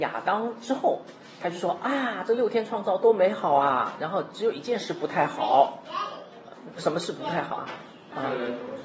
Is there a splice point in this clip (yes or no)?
no